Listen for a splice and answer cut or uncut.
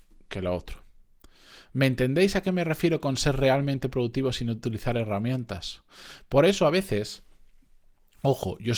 uncut